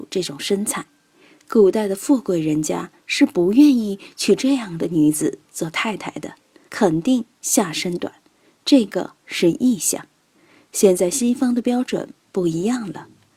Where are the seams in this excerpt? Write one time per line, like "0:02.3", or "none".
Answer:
0:06.7